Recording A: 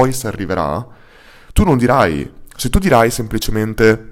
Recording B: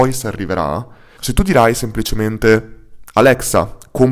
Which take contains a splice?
B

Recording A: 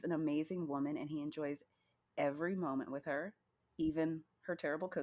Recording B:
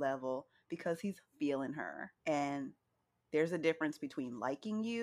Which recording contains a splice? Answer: B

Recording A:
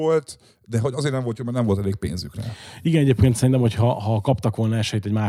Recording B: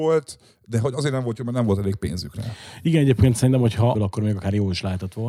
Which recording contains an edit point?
B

